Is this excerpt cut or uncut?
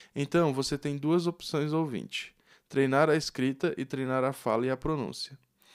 uncut